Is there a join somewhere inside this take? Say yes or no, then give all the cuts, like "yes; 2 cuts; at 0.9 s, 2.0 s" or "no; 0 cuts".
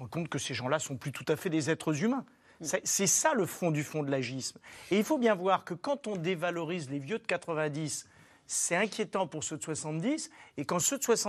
no; 0 cuts